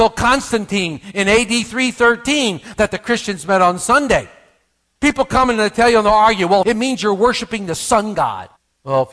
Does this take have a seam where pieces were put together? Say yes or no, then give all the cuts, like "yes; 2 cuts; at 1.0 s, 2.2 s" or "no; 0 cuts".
yes; 2 cuts; at 5.0 s, 6.6 s